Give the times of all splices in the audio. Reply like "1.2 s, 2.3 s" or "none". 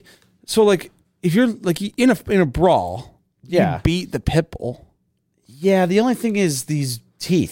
none